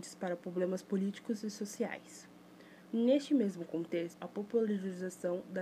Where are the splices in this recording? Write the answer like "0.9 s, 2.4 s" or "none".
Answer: 2.9 s, 4.1 s